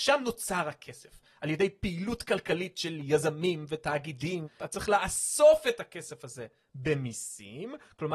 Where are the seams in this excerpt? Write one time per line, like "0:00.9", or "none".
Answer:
0:04.6